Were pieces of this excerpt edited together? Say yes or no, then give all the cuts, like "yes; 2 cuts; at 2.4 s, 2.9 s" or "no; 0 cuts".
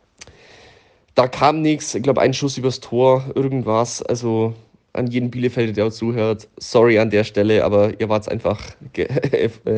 no; 0 cuts